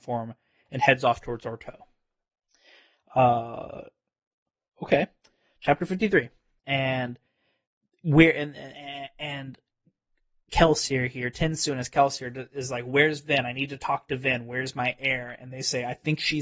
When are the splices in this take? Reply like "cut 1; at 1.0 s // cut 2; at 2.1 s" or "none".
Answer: cut 1; at 6.6 s

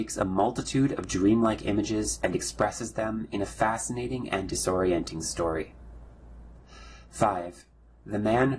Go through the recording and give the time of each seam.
none

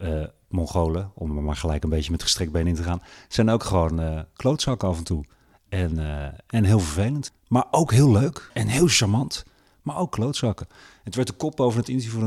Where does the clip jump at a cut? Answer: none

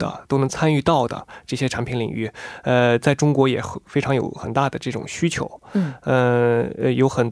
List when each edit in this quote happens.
none

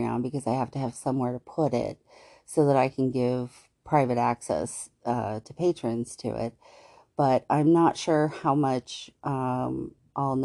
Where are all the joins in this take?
none

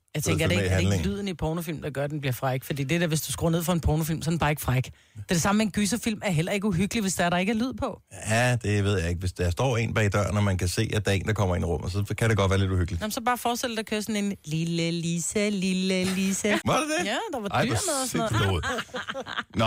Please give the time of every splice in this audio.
cut 1; at 16.6 s // cut 2; at 18.3 s

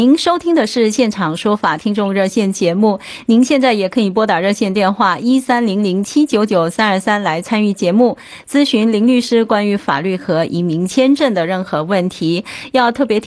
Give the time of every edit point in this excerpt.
none

